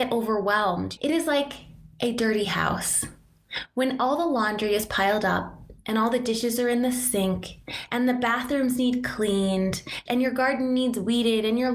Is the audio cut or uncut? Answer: cut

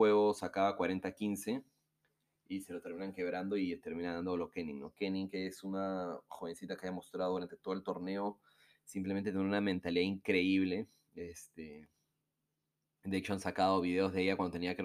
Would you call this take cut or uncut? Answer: uncut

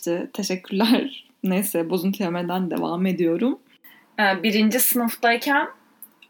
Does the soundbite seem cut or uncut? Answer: uncut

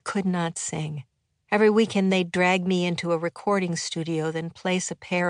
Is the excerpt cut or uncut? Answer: cut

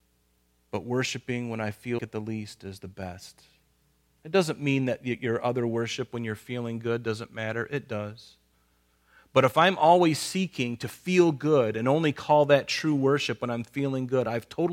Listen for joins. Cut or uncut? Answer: cut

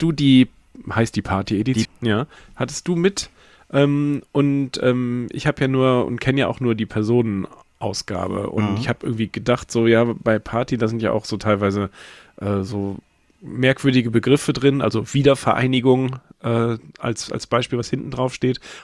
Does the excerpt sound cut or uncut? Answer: cut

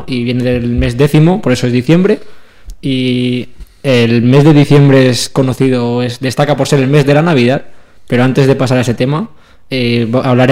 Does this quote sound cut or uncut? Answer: uncut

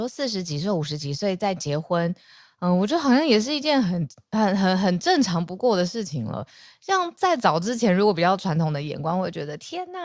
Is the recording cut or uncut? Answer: uncut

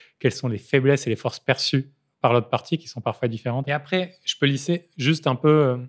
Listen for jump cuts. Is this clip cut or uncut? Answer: uncut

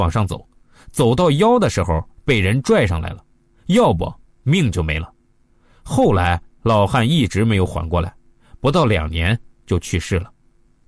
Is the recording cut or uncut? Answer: uncut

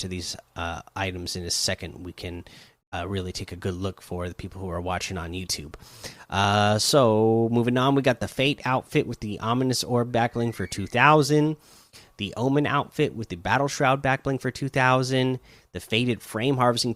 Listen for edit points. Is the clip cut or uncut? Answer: uncut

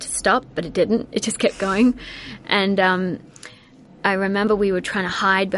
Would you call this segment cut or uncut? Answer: uncut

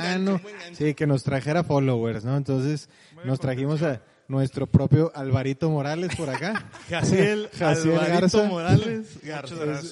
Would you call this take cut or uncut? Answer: uncut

